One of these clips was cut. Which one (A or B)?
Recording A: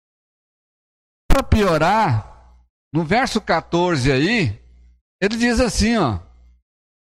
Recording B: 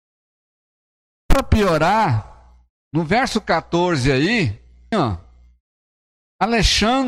B